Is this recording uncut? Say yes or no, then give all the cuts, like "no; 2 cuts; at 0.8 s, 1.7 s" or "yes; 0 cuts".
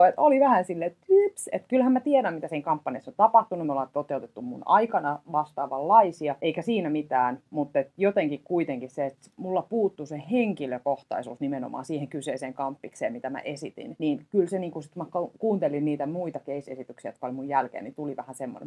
yes; 0 cuts